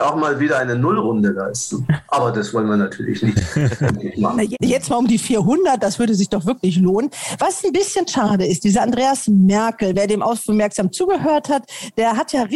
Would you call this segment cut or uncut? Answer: uncut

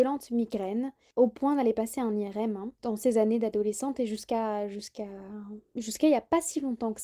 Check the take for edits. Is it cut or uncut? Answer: cut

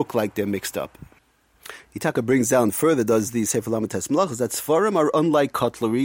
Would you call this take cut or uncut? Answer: uncut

